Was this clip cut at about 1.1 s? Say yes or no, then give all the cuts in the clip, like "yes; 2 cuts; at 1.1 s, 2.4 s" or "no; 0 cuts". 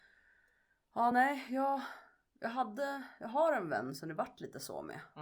no; 0 cuts